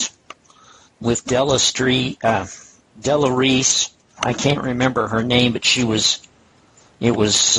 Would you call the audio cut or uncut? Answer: cut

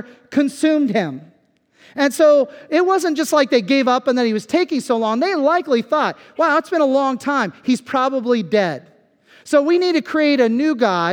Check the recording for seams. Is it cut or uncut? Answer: uncut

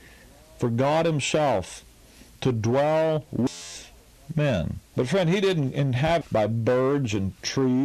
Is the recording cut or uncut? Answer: cut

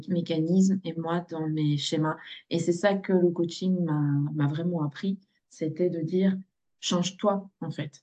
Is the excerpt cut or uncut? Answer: uncut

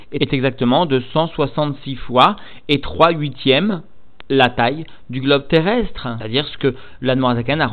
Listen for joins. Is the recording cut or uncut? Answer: uncut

